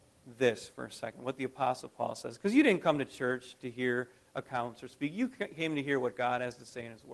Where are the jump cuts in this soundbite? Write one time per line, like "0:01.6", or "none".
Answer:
none

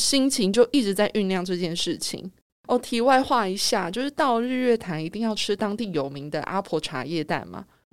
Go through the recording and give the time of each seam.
0:02.5

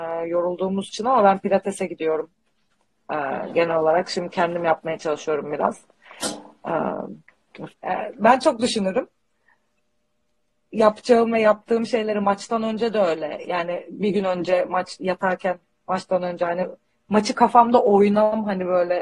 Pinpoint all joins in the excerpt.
0:07.7

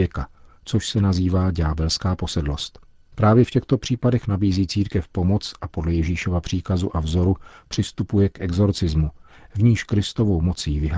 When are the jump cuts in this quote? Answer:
0:09.3

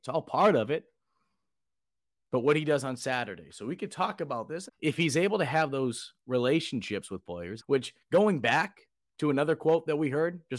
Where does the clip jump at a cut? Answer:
0:04.7
0:07.6

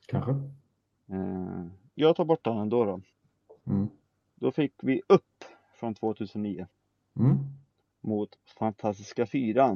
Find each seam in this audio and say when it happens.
0:02.0
0:03.6

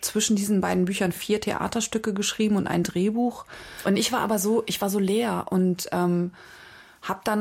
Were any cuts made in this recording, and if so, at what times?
0:03.8

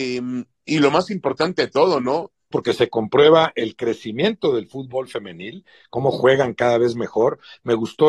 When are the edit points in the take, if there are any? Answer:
0:02.5

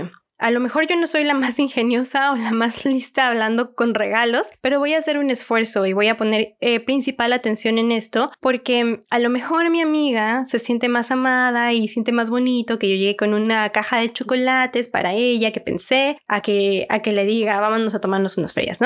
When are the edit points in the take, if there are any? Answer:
none

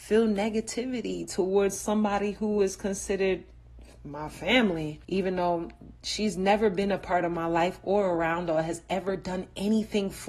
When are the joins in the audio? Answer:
0:05.0

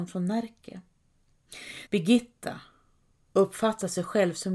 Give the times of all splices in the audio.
0:01.9

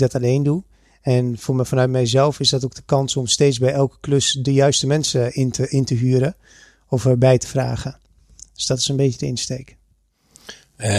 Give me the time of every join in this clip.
none

